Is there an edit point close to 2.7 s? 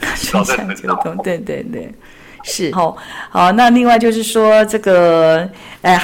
yes; 2 cuts; at 1.4 s, 2.7 s

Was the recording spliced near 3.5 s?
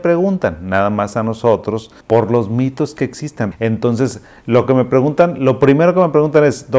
yes; 2 cuts; at 2.0 s, 3.5 s

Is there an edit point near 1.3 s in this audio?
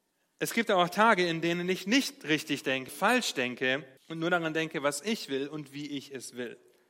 no; 2 cuts; at 2.9 s, 4.0 s

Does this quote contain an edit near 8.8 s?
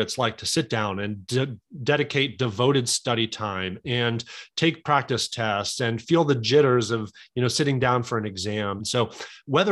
yes; 1 cut; at 8.8 s

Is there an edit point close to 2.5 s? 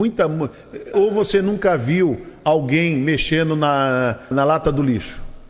no; 2 cuts; at 0.9 s, 4.3 s

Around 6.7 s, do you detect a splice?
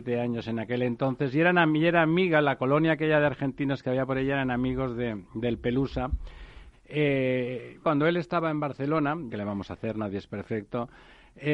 yes; 3 cuts; at 6.7 s, 7.8 s, 9.3 s

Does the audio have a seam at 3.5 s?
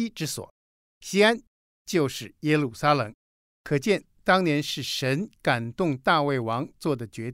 no; 0 cuts

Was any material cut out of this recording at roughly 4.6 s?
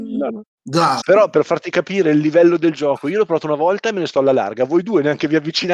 no; 1 cut; at 1.0 s

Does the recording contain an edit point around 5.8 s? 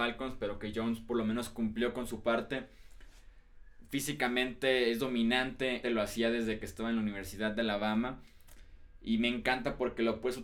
yes; 1 cut; at 5.8 s

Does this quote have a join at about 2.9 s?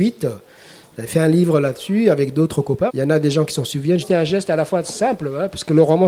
yes; 2 cuts; at 2.9 s, 4.0 s

